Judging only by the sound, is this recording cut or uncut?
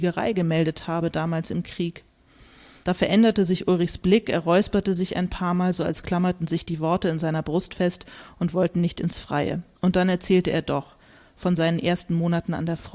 uncut